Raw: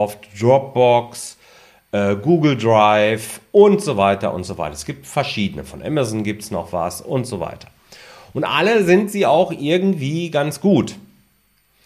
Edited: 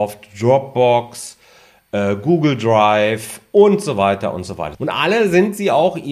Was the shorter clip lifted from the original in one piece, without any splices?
no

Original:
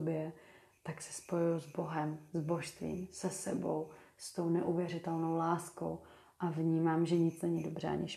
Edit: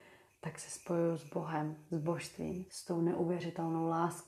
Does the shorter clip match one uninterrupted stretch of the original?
no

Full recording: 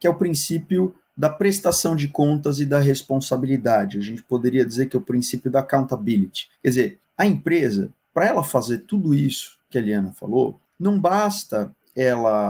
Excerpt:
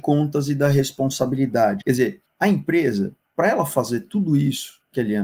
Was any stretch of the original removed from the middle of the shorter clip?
yes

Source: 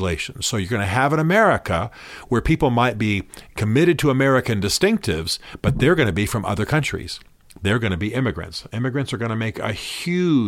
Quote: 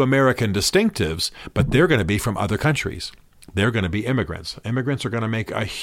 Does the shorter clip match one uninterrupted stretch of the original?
yes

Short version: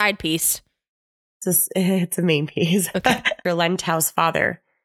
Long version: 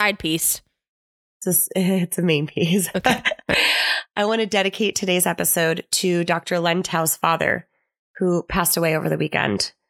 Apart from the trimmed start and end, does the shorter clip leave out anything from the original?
yes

